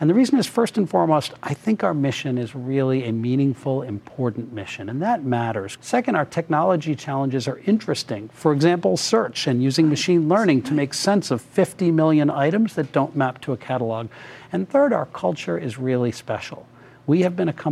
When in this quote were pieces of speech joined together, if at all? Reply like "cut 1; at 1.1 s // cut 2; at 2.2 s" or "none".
cut 1; at 5.8 s